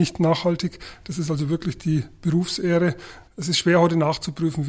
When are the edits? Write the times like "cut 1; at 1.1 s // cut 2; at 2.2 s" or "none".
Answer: cut 1; at 3.3 s

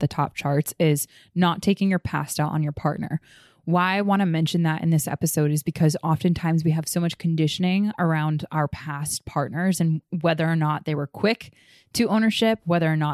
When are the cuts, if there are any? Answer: none

